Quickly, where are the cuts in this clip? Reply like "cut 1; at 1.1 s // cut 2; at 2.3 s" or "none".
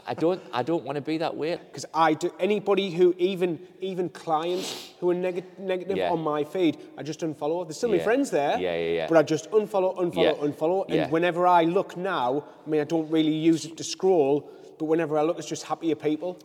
cut 1; at 1.6 s